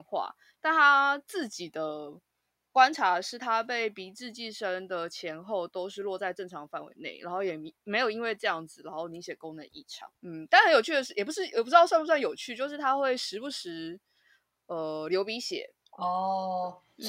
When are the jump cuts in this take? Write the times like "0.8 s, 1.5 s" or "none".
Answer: none